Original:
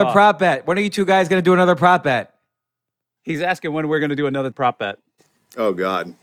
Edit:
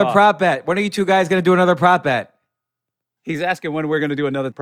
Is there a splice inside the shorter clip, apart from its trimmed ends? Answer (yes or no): no